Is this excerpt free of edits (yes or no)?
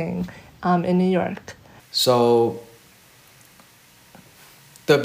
no